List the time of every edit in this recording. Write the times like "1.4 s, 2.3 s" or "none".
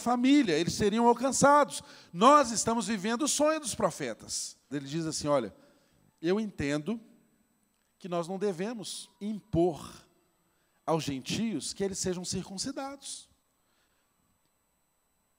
4.7 s, 9.2 s